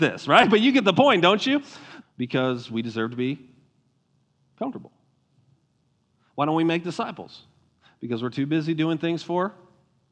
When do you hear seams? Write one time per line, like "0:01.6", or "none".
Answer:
0:02.0